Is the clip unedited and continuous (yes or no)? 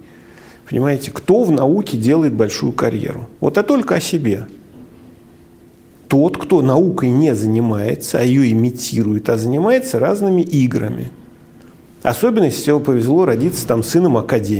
yes